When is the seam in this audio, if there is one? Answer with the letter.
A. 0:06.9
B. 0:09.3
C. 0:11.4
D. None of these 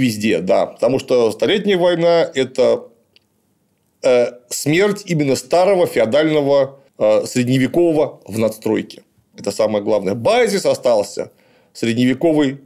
A